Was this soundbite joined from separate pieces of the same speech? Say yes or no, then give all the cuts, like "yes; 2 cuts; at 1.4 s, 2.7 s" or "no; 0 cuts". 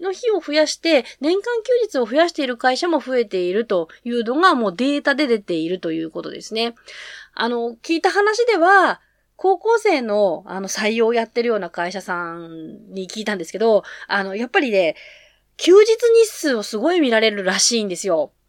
no; 0 cuts